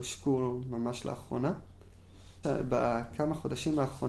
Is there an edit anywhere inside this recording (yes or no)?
yes